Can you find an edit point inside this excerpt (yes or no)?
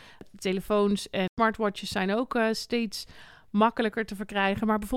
no